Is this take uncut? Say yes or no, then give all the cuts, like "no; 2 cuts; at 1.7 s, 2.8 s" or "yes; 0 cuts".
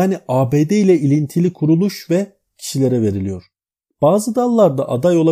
yes; 0 cuts